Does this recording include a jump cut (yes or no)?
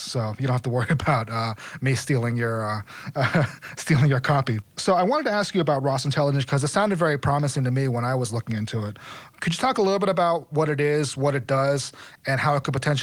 no